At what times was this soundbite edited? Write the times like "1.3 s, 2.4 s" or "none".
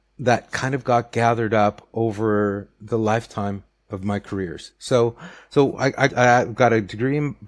6.1 s